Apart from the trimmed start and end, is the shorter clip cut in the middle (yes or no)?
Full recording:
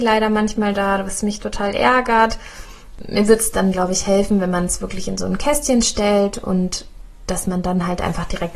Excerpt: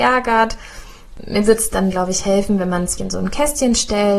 yes